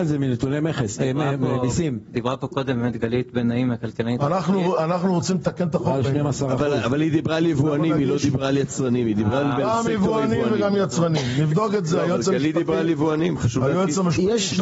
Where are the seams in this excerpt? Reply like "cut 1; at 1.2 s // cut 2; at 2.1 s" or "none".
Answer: none